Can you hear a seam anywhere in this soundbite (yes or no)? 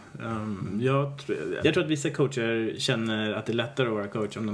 yes